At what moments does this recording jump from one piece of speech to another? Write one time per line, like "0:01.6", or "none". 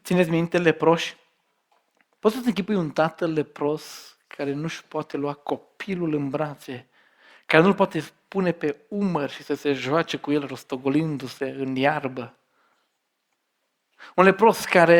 0:02.2